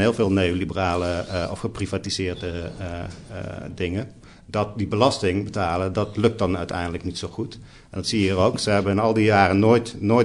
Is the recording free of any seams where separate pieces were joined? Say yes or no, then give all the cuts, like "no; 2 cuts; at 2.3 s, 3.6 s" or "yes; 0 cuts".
yes; 0 cuts